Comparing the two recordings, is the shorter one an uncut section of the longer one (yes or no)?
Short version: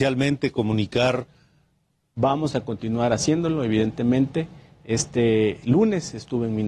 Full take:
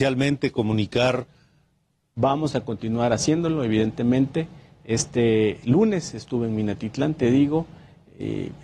yes